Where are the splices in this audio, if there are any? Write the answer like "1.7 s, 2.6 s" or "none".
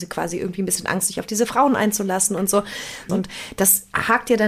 3.1 s